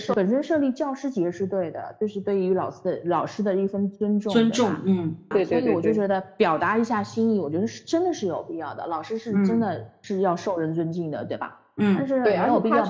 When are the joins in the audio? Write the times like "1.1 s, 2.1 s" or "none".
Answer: 5.3 s